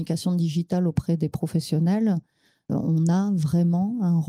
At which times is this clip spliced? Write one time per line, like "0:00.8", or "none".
0:02.7